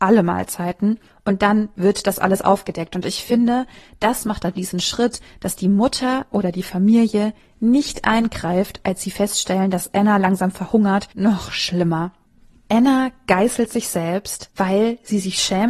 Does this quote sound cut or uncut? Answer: uncut